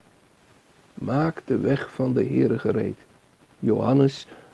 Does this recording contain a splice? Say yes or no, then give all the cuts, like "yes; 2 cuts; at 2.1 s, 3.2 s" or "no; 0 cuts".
yes; 1 cut; at 3.4 s